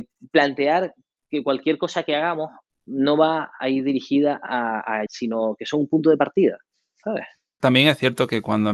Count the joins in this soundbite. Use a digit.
2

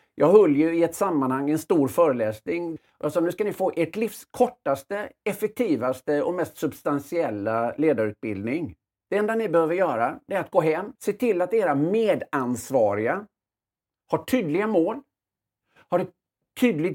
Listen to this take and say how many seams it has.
1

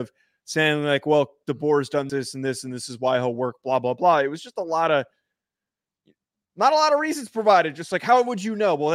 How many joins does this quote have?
1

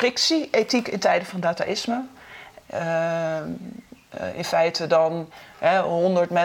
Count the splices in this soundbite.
1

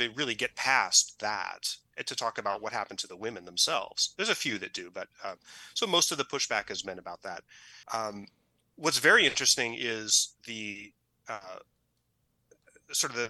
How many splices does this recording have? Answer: 2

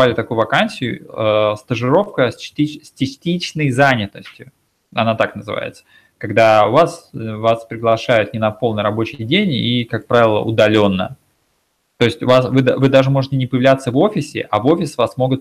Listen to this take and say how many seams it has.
0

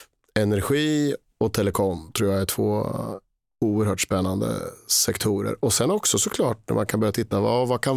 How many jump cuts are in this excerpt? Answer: 0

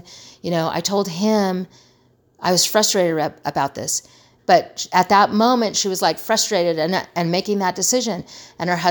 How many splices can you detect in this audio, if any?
1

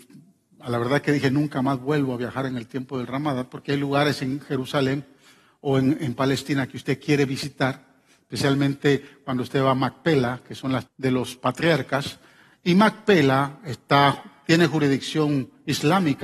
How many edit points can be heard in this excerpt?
1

